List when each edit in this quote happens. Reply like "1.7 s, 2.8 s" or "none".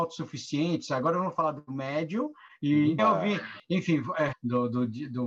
3.0 s, 4.3 s